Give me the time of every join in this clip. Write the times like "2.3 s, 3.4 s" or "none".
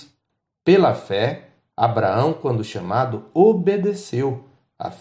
none